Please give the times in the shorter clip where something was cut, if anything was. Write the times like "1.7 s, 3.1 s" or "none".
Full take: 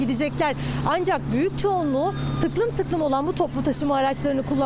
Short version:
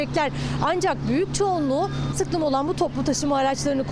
2.1 s